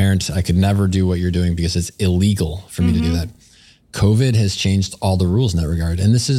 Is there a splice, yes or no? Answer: no